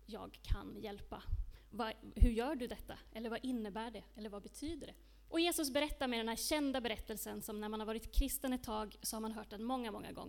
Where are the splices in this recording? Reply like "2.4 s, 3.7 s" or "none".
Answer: 1.7 s, 5.3 s